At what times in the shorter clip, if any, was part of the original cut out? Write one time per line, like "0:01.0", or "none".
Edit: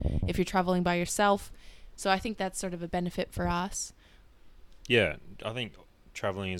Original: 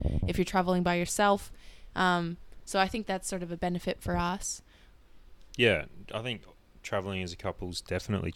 0:01.9